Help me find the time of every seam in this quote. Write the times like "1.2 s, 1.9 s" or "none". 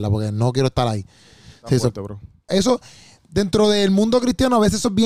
2.5 s